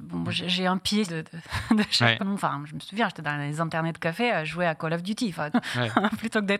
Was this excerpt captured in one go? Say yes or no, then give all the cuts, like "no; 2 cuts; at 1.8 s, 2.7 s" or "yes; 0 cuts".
no; 3 cuts; at 1.1 s, 2.2 s, 5.5 s